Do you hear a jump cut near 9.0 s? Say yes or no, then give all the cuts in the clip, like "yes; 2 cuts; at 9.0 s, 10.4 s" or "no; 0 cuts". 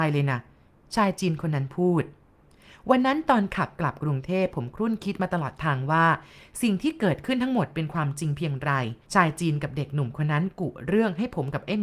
yes; 1 cut; at 9.0 s